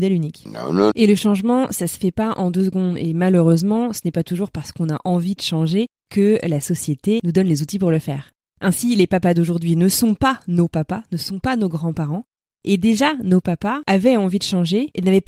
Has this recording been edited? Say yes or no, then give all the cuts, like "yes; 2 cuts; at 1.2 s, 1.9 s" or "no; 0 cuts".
yes; 1 cut; at 0.9 s